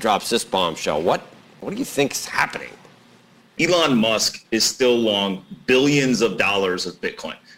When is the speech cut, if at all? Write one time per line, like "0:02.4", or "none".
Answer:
0:03.6